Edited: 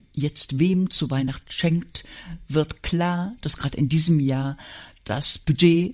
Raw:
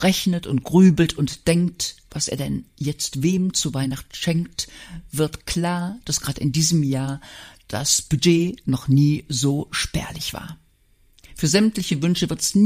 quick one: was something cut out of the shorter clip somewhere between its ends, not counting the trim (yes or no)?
no